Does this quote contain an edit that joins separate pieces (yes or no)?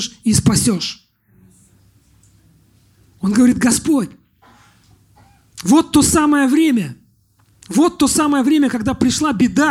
no